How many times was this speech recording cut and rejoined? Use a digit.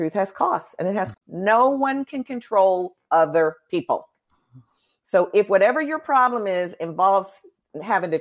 1